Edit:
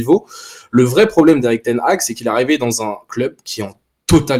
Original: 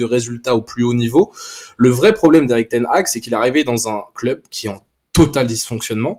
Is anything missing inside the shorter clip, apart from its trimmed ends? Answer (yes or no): no